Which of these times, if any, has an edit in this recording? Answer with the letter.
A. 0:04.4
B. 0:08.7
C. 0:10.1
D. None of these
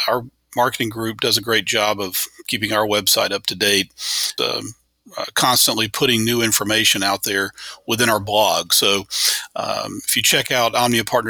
A